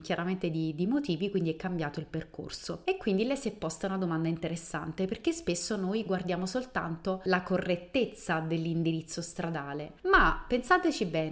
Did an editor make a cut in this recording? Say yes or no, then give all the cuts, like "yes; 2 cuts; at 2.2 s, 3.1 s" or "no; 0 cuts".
no; 0 cuts